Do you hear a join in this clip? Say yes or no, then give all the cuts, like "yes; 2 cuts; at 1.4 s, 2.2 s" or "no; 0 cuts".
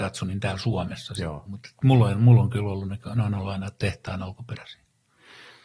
yes; 1 cut; at 1.5 s